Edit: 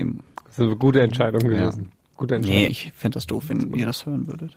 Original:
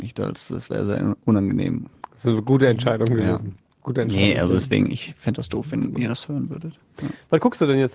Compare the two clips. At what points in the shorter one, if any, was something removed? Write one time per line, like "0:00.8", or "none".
0:02.7